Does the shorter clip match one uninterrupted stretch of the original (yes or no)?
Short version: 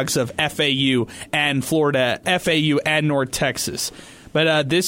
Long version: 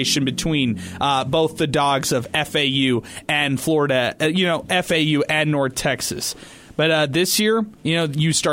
no